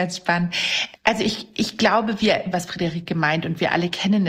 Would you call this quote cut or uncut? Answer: cut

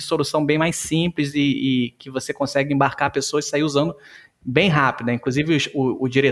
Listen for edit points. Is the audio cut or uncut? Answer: uncut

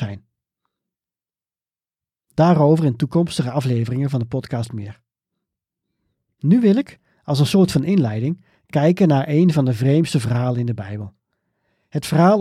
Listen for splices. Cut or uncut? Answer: uncut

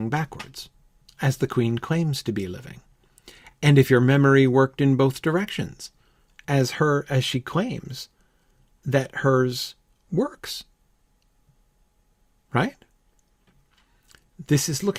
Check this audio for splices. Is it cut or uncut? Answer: uncut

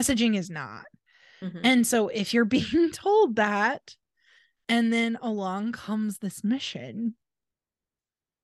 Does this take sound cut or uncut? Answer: uncut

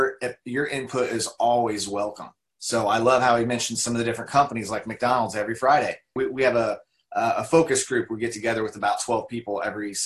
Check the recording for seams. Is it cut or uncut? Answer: cut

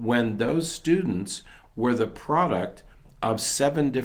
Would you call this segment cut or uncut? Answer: uncut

